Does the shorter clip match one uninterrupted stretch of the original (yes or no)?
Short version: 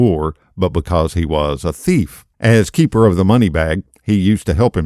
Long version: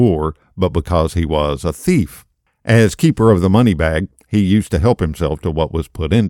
no